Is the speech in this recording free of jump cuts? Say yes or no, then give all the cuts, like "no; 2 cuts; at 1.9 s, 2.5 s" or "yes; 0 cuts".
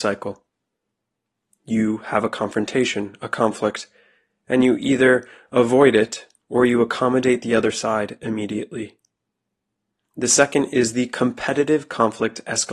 yes; 0 cuts